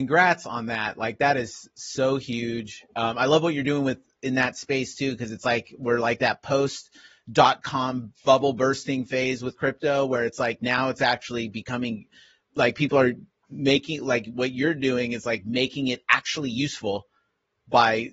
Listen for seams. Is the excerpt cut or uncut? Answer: uncut